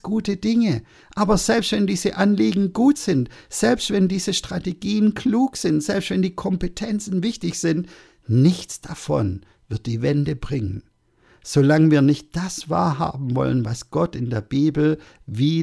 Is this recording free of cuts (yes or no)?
yes